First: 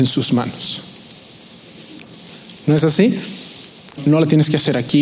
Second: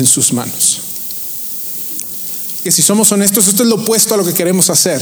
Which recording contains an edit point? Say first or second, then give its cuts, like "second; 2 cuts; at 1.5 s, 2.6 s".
first; 2 cuts; at 2.6 s, 4.0 s